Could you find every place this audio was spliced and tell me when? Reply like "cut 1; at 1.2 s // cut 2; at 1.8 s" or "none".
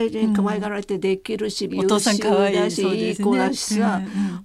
cut 1; at 1.7 s